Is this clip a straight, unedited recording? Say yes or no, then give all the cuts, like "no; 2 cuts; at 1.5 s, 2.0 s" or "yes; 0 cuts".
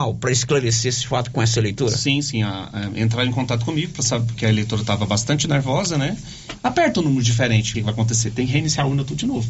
no; 2 cuts; at 6.6 s, 7.7 s